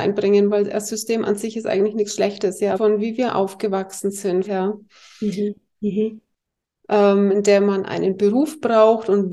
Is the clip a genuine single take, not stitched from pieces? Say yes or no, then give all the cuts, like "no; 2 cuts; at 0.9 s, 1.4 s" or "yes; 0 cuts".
no; 3 cuts; at 2.8 s, 4.4 s, 5.7 s